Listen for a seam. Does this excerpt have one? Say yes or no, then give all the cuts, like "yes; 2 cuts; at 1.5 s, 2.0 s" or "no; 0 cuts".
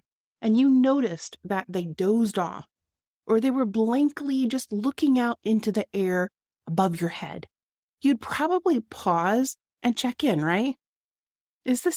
no; 0 cuts